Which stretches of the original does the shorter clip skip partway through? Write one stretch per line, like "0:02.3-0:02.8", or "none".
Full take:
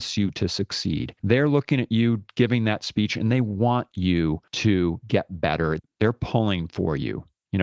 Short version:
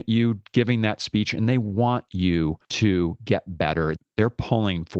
none